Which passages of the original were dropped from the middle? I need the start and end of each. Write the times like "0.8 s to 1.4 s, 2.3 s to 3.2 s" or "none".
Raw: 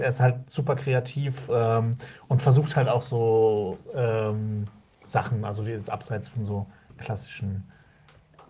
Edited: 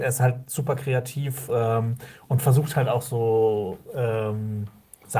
none

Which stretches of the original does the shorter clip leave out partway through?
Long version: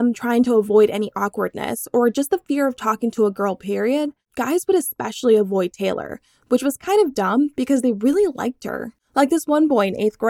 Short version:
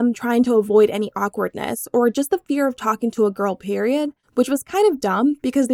4.2 s to 6.4 s

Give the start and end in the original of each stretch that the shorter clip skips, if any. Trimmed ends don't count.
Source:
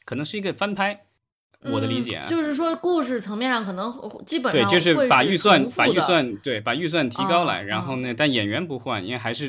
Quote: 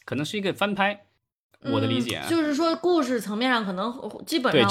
none

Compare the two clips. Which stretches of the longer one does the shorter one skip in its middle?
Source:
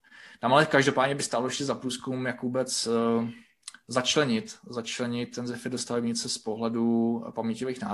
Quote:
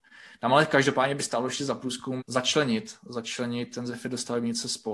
2.2 s to 3.8 s

